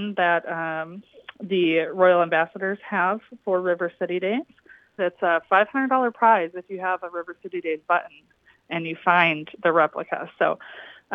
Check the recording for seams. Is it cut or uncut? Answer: cut